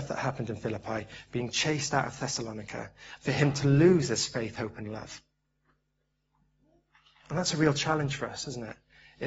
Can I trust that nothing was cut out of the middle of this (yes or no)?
no